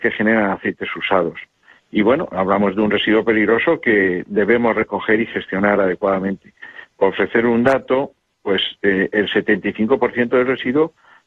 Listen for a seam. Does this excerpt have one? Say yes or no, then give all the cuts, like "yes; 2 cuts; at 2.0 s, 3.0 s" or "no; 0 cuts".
no; 0 cuts